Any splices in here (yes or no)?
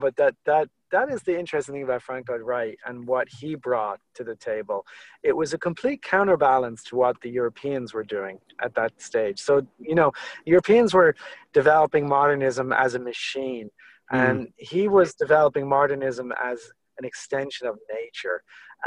no